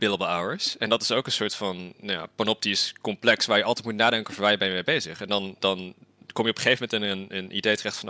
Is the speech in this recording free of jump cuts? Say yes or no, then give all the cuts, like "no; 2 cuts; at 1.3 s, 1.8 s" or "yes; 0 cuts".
yes; 0 cuts